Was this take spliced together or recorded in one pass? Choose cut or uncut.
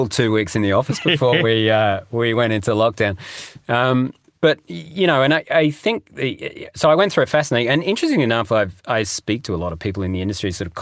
uncut